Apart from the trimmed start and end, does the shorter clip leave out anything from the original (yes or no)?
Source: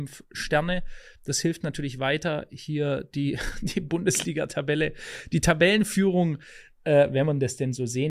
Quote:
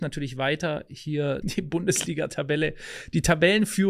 yes